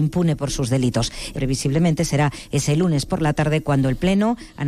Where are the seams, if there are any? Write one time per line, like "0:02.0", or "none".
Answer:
0:01.3